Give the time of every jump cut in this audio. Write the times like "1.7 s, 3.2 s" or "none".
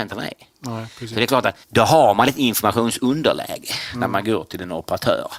1.6 s